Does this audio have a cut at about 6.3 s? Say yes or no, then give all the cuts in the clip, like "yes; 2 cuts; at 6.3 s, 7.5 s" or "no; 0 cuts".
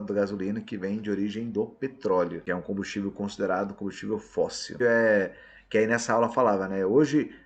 no; 1 cut; at 4.8 s